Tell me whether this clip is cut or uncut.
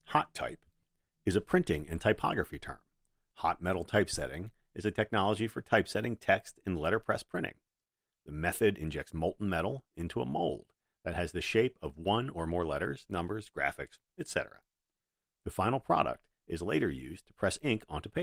uncut